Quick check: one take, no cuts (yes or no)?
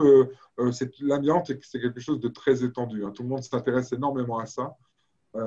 yes